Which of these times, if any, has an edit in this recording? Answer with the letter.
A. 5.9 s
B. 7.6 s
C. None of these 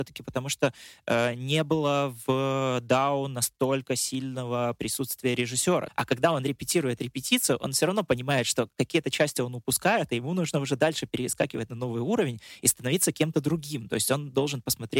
A